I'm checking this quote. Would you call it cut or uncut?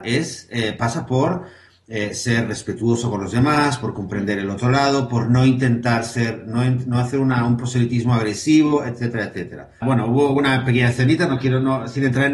cut